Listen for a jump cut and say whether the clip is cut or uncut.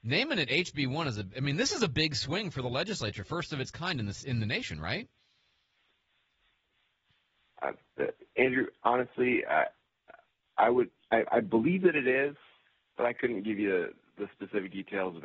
uncut